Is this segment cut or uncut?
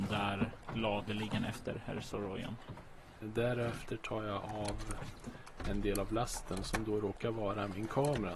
cut